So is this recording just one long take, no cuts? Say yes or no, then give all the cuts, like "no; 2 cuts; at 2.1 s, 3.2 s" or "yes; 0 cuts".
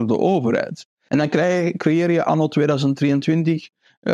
no; 1 cut; at 1.1 s